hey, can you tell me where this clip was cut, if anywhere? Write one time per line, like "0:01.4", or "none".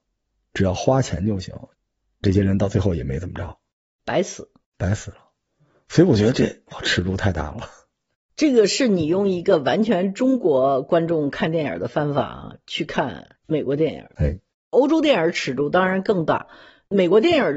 none